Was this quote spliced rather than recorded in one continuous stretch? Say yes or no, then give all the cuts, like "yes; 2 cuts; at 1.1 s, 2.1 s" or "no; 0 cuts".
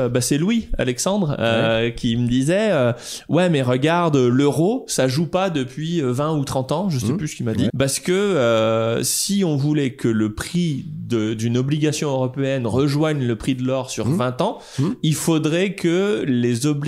yes; 1 cut; at 7.7 s